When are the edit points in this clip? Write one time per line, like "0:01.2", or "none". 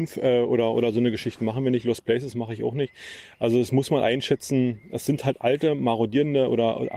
none